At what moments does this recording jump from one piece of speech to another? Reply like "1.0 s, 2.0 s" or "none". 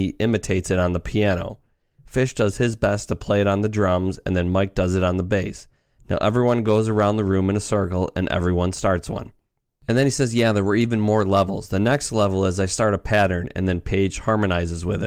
none